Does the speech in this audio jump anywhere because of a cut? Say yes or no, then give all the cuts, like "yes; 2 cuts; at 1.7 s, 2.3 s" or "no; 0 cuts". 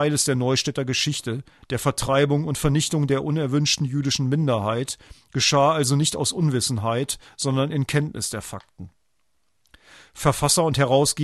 no; 0 cuts